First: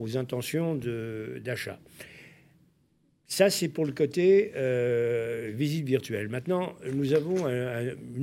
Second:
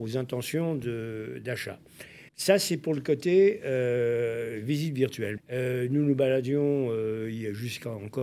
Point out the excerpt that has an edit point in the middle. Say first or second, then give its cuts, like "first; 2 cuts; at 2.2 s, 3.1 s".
second; 2 cuts; at 2.3 s, 5.4 s